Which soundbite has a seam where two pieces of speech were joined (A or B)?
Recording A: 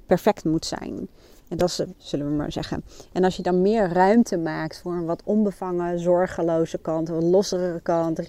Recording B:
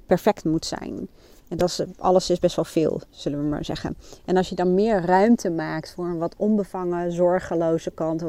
A